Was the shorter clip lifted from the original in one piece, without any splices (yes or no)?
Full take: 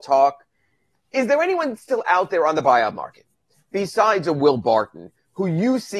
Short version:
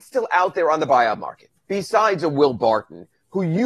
no